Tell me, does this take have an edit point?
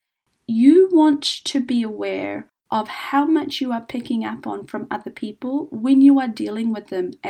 no; 0 cuts

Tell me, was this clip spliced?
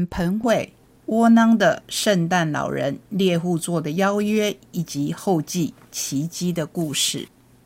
no; 0 cuts

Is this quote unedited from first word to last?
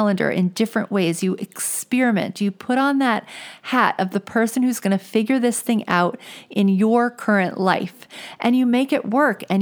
yes; 0 cuts

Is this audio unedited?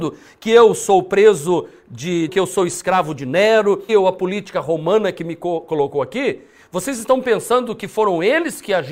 no; 2 cuts; at 2.3 s, 3.9 s

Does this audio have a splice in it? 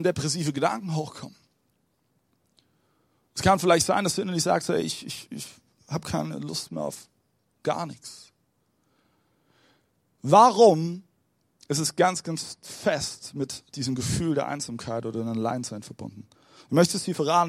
no; 0 cuts

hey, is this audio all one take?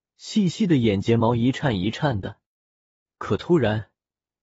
no; 1 cut; at 3.1 s

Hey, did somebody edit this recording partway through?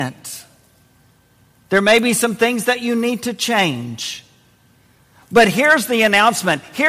no; 0 cuts

